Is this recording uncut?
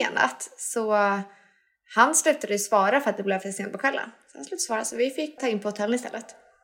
no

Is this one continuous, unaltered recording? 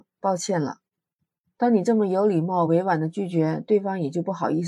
yes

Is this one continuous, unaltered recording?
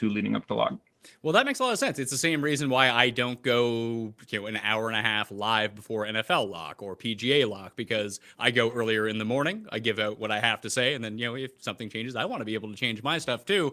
yes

